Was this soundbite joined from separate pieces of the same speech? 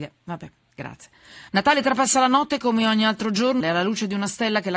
yes; 2 cuts; at 1.5 s, 3.6 s

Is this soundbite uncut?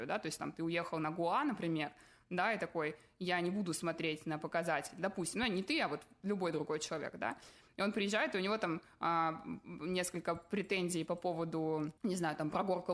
yes; 0 cuts

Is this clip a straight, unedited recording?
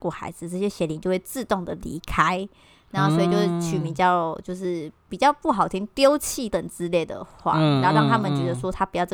no; 1 cut; at 6.5 s

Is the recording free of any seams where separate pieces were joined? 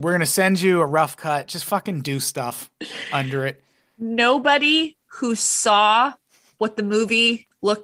yes; 0 cuts

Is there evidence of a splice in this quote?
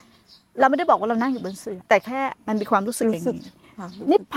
yes; 1 cut; at 1.9 s

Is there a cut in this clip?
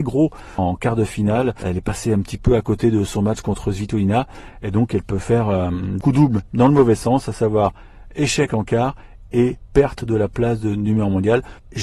no; 0 cuts

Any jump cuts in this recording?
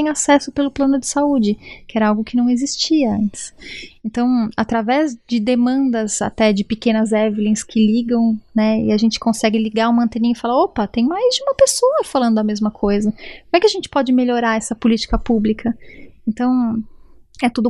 no; 0 cuts

